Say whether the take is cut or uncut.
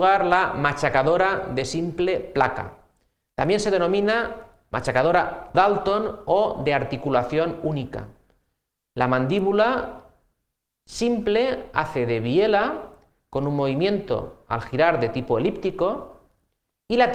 cut